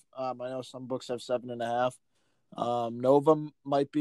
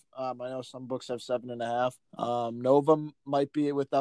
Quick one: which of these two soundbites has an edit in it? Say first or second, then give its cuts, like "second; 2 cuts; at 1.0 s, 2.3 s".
second; 1 cut; at 2.1 s